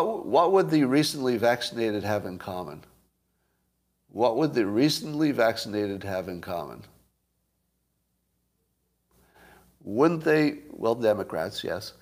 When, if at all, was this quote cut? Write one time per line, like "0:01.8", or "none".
none